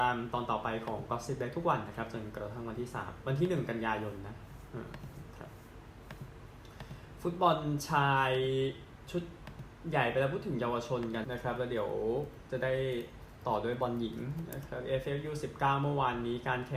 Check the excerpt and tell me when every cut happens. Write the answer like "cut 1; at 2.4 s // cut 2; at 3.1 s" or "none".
cut 1; at 11.2 s